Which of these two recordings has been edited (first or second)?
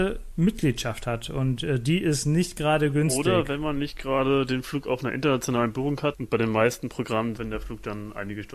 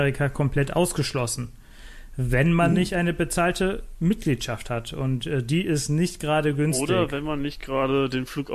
first